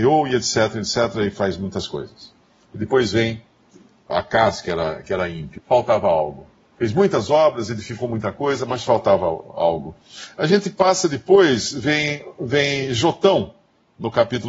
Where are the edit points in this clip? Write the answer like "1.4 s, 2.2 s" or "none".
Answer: 5.6 s